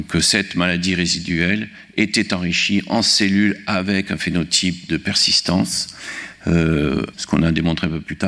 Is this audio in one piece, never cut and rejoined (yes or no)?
no